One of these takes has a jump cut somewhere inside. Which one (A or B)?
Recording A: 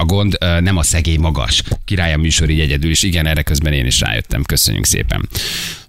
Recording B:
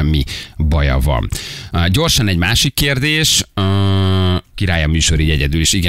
B